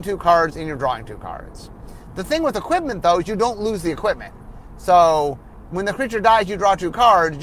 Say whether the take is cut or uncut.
uncut